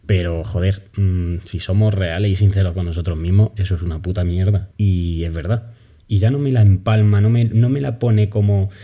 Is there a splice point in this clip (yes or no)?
yes